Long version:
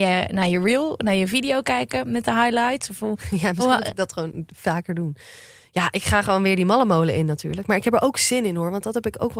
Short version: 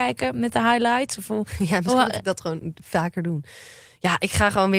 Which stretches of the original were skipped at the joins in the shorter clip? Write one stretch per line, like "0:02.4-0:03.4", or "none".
none